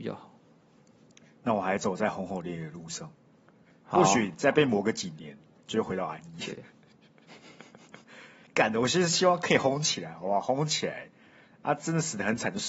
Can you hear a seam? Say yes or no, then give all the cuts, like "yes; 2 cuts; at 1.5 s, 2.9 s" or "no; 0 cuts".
yes; 1 cut; at 5.7 s